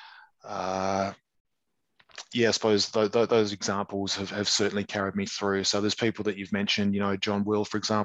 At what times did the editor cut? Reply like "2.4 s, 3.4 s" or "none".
none